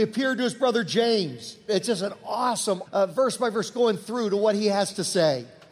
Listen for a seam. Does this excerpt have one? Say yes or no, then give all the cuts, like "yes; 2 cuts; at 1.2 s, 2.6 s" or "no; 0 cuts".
yes; 2 cuts; at 1.7 s, 2.8 s